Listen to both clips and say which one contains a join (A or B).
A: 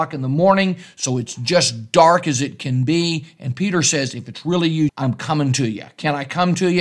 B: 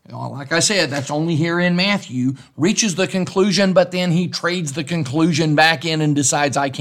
A